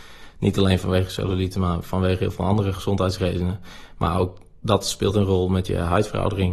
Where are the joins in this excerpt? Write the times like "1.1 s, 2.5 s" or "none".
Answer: none